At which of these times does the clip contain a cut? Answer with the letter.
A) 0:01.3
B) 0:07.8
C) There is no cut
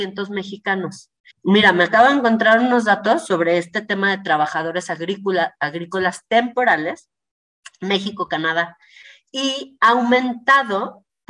A